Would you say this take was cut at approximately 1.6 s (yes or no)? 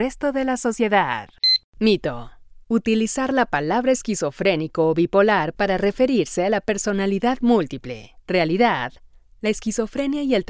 no